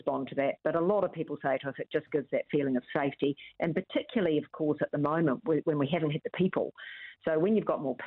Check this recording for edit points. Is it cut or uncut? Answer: uncut